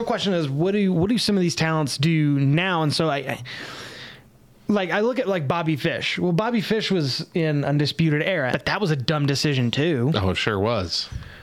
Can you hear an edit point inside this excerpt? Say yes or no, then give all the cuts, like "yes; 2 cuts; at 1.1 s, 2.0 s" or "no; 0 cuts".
yes; 1 cut; at 8.5 s